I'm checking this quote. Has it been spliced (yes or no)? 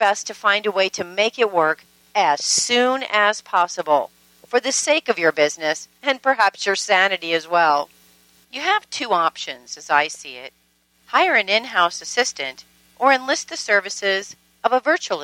no